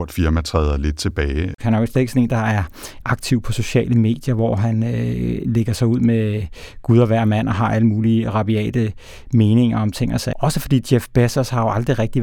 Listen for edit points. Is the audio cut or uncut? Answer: cut